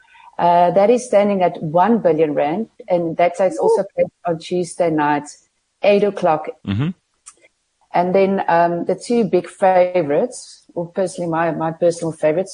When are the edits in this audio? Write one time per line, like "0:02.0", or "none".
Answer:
0:06.6